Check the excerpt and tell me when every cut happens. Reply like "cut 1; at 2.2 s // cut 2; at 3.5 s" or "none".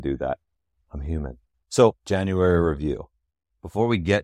cut 1; at 1.6 s